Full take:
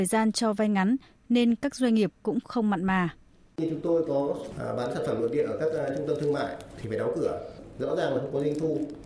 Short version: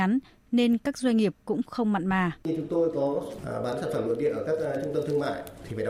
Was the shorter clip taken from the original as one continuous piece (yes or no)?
no